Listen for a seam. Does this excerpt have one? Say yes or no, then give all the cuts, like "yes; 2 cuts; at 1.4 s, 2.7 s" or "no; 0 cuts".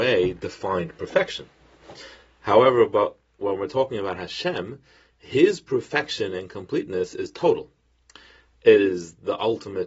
no; 0 cuts